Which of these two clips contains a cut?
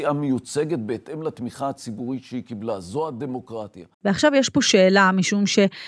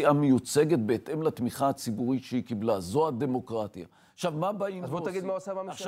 first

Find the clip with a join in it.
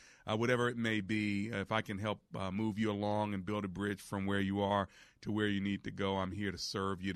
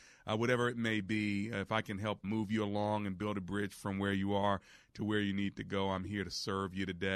second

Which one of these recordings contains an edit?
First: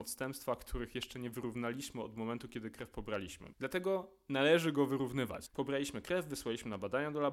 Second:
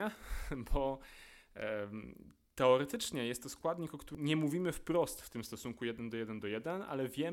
first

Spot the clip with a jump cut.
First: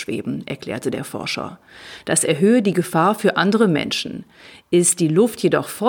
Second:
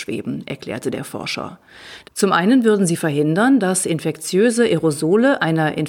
second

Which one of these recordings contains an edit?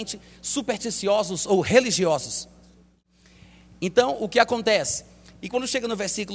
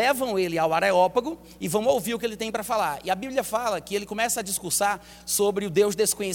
first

